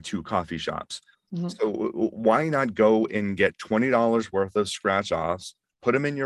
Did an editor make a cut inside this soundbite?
yes; 1 cut; at 1.1 s

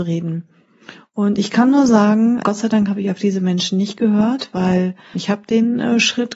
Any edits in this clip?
yes; 2 cuts; at 2.4 s, 5.1 s

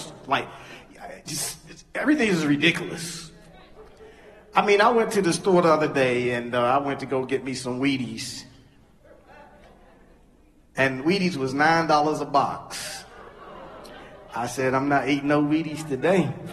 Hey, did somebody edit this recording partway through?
no; 0 cuts

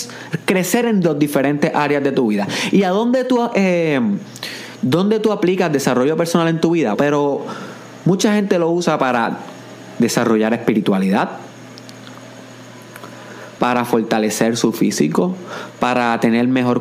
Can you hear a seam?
yes; 2 cuts; at 6.9 s, 13.6 s

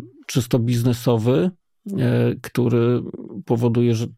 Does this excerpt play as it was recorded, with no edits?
yes; 0 cuts

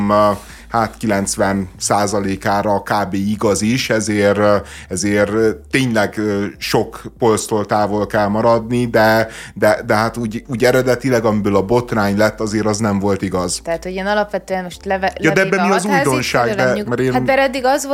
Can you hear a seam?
yes; 2 cuts; at 13.6 s, 16.8 s

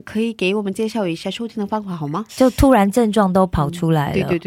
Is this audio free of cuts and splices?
no; 1 cut; at 2.3 s

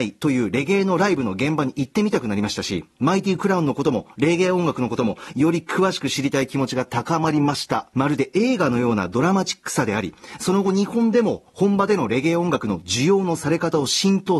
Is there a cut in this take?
yes; 1 cut; at 7.9 s

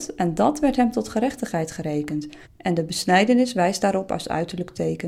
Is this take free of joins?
no; 1 cut; at 2.4 s

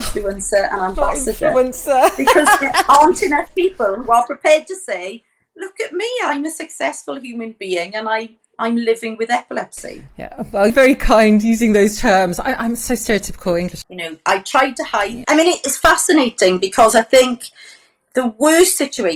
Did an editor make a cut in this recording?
yes; 3 cuts; at 10.7 s, 13.8 s, 15.2 s

